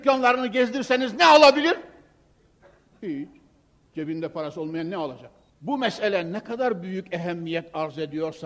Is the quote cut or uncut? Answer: cut